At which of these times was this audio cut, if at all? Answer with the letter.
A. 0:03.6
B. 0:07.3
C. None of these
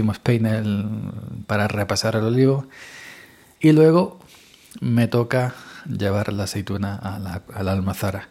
A